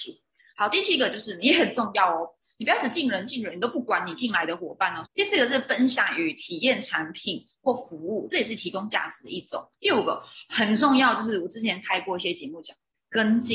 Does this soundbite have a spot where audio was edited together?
yes; 2 cuts; at 5.1 s, 9.7 s

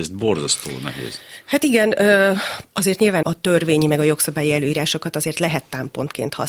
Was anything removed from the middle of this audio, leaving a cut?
yes; 1 cut; at 3.2 s

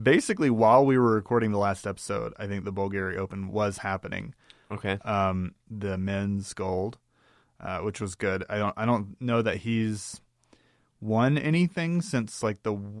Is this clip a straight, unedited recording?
no; 1 cut; at 5.7 s

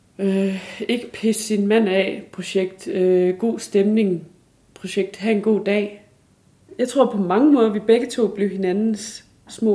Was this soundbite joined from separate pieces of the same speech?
no; 0 cuts

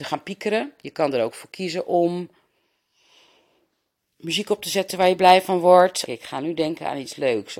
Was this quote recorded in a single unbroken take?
no; 1 cut; at 6.1 s

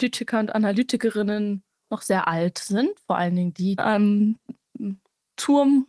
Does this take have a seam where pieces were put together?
yes; 1 cut; at 3.8 s

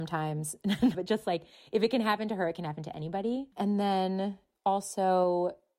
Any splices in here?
yes; 2 cuts; at 0.9 s, 3.5 s

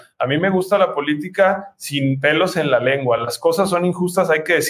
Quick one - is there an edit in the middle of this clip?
no; 0 cuts

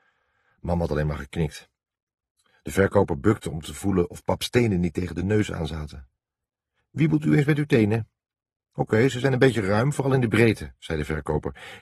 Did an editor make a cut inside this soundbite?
no; 0 cuts

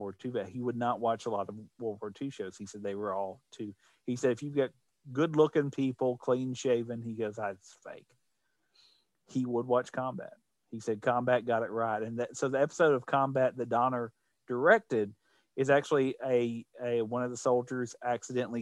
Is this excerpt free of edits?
yes; 0 cuts

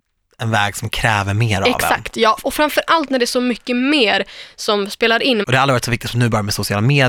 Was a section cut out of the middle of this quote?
yes; 1 cut; at 5.4 s

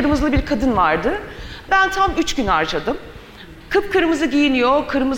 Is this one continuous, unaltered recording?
no; 2 cuts; at 1.7 s, 3.6 s

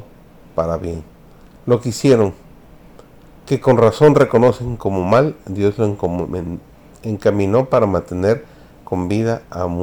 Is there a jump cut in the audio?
no; 0 cuts

